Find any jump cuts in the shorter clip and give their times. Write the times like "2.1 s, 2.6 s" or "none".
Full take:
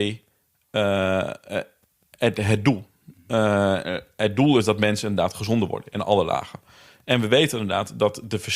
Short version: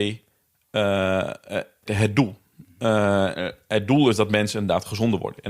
1.9 s